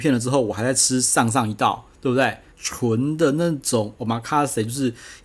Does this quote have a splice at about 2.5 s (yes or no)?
yes